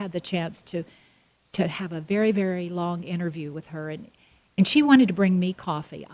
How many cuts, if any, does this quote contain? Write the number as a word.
zero